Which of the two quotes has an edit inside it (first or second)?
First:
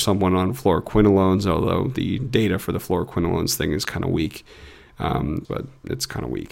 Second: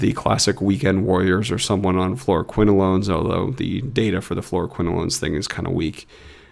first